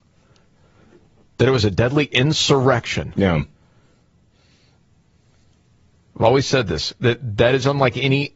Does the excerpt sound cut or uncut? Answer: uncut